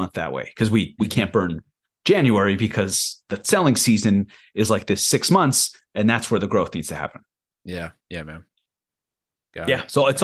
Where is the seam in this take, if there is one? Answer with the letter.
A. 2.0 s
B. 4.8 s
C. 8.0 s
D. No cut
C